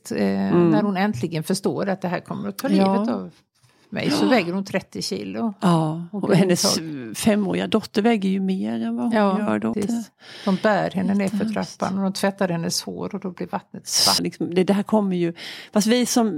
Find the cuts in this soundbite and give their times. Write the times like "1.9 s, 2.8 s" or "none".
9.7 s, 14.2 s